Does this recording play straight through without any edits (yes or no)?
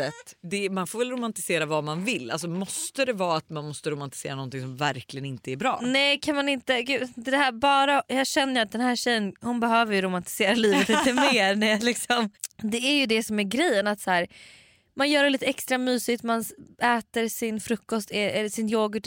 yes